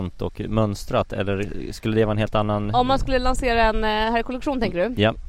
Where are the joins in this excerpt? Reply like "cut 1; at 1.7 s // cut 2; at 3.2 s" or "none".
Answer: none